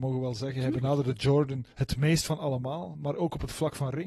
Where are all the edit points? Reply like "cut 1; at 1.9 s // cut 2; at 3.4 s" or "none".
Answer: cut 1; at 1.7 s